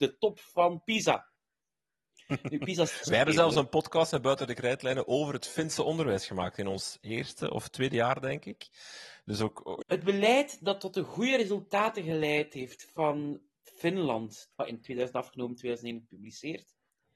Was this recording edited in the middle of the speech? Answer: yes; 2 cuts; at 9.8 s, 14.5 s

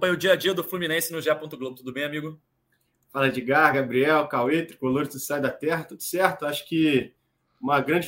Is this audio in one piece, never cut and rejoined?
yes; 0 cuts

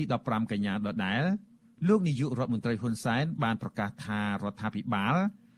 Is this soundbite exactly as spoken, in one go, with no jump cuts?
yes; 0 cuts

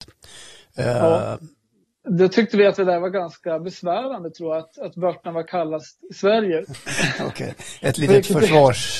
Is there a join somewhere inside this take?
yes; 2 cuts; at 2.0 s, 6.6 s

